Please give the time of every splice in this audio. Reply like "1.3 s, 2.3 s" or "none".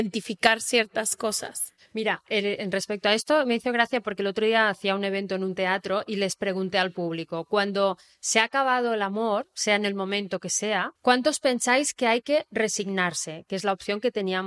11.0 s